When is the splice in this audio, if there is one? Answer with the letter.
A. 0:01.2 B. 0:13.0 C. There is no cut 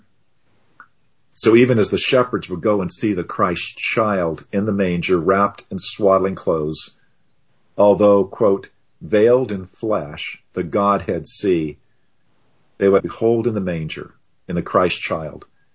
B